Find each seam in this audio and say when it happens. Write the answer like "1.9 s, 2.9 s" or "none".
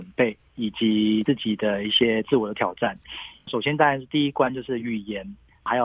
none